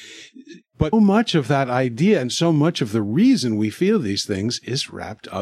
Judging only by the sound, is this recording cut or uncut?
cut